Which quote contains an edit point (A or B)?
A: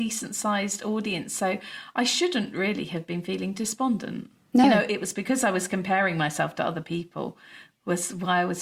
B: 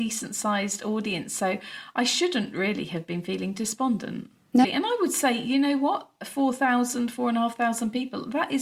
B